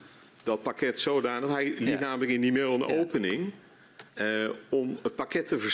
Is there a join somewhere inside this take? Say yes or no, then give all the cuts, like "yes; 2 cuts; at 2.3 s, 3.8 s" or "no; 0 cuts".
yes; 1 cut; at 4.1 s